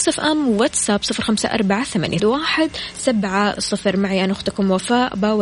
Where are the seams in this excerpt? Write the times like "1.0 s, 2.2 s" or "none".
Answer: 2.2 s, 3.6 s